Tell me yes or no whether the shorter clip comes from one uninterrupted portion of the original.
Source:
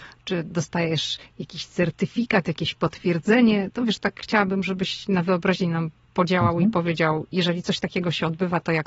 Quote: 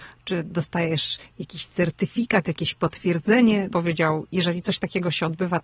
no